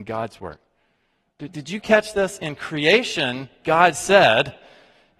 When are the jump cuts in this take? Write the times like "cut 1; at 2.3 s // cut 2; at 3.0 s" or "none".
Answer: none